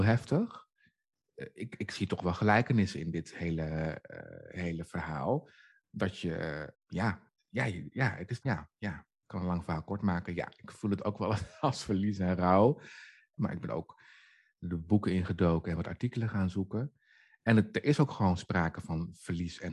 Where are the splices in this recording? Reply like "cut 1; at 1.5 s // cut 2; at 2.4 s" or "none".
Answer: cut 1; at 6.7 s // cut 2; at 8.4 s // cut 3; at 13.4 s